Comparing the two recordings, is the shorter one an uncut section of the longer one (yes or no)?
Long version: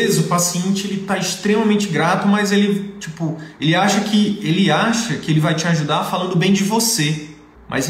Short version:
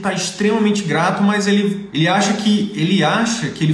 no